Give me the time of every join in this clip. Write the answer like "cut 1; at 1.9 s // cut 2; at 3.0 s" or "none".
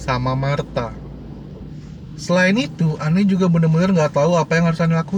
none